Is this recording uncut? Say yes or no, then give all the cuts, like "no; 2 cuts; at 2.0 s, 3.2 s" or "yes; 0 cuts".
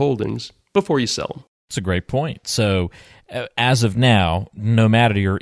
yes; 0 cuts